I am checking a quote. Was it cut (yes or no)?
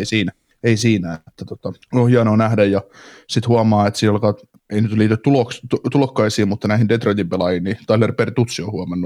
yes